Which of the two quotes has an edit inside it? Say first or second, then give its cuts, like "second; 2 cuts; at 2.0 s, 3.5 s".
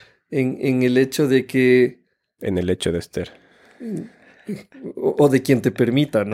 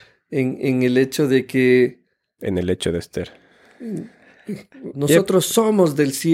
second; 1 cut; at 4.9 s